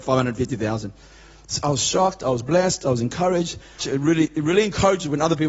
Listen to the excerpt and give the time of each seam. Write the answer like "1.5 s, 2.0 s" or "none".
3.8 s